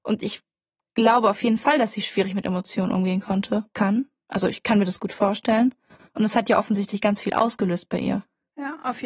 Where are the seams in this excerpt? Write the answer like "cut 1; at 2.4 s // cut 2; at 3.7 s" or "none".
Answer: cut 1; at 3.7 s // cut 2; at 6.1 s